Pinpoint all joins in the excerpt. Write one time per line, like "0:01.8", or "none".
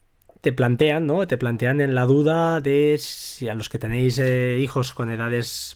none